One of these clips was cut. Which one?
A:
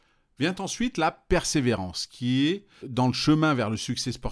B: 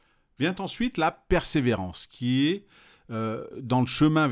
A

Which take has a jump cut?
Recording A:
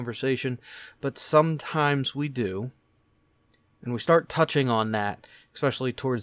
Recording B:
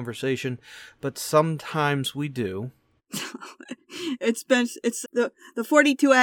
B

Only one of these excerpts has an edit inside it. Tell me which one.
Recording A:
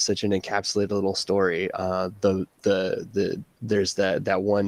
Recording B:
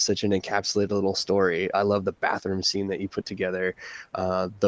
A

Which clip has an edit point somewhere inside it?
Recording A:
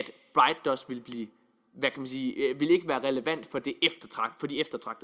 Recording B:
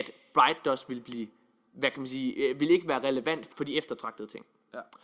B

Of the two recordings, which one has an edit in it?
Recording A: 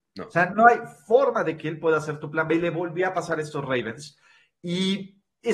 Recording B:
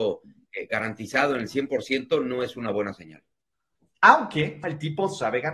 B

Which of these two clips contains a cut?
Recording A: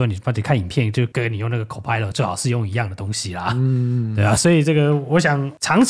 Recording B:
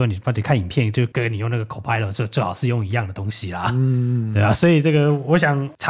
A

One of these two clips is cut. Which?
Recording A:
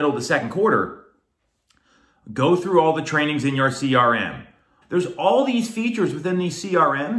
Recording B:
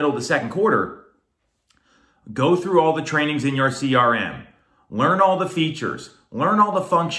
A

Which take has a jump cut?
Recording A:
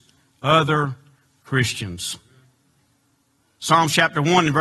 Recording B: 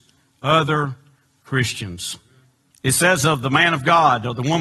B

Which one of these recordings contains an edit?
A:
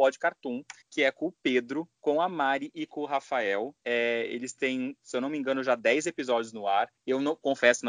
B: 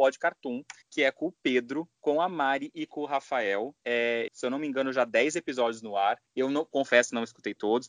B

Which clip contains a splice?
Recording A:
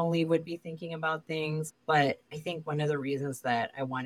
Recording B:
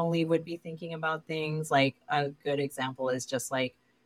A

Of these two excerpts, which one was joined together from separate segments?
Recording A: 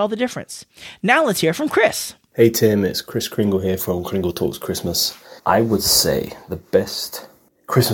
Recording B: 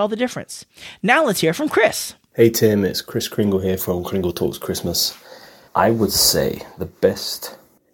A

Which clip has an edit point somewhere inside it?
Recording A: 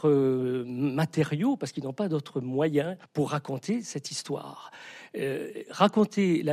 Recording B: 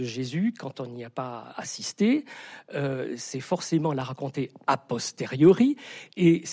A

